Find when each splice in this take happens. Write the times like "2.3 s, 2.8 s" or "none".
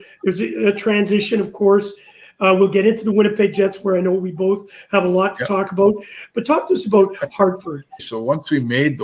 6.3 s, 8.0 s